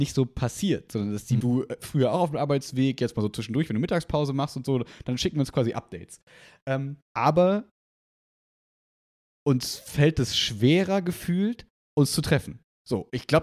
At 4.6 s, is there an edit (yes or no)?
no